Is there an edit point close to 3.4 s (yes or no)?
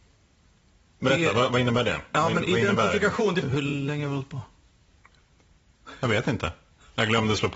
yes